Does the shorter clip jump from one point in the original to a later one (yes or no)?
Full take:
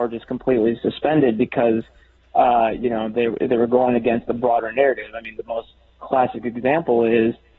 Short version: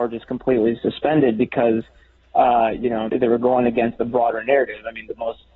yes